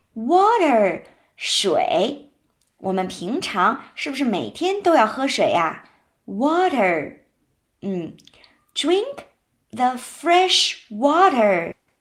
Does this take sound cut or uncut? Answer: uncut